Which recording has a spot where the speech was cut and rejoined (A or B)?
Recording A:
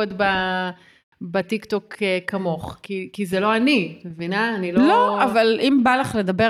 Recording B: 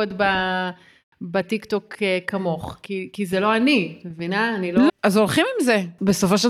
B